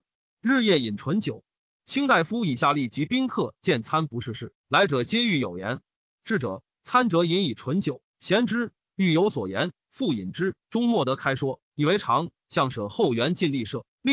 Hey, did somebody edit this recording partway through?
yes; 1 cut; at 10.6 s

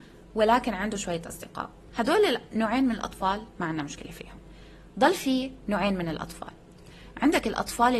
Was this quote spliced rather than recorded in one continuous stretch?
no; 0 cuts

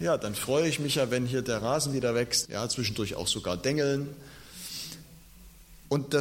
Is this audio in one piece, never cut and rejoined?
no; 1 cut; at 2.4 s

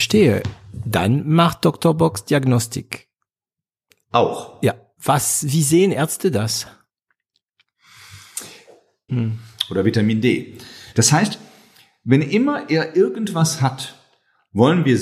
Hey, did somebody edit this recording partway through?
yes; 2 cuts; at 9.1 s, 10.9 s

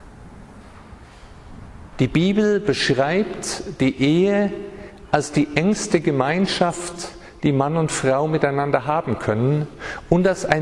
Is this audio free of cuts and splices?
no; 1 cut; at 1.9 s

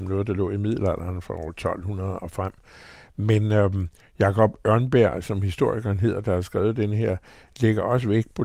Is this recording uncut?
yes; 0 cuts

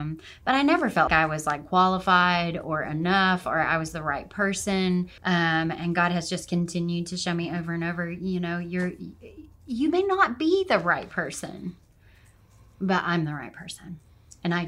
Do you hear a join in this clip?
yes; 2 cuts; at 1.1 s, 5.2 s

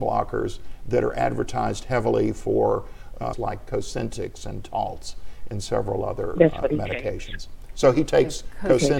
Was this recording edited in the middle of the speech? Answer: yes; 1 cut; at 3.3 s

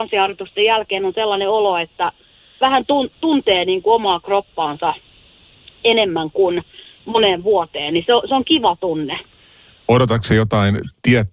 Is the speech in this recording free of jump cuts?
yes; 0 cuts

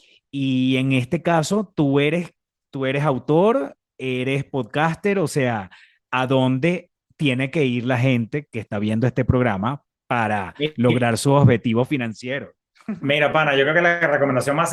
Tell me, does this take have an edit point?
no; 0 cuts

